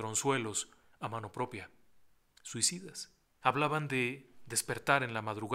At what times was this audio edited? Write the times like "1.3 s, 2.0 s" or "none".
3.4 s